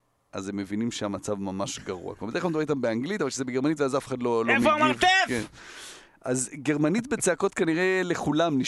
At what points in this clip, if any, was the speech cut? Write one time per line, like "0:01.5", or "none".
none